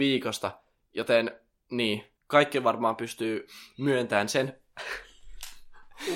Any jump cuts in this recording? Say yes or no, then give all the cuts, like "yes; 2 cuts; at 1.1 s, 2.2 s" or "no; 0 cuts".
yes; 1 cut; at 2.2 s